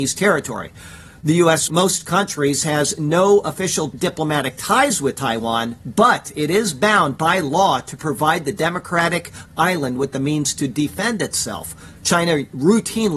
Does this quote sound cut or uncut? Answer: cut